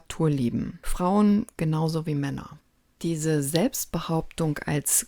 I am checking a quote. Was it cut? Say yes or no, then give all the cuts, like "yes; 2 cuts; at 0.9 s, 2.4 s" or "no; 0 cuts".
no; 0 cuts